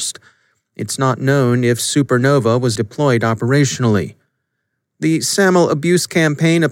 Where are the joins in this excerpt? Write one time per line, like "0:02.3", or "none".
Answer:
0:02.8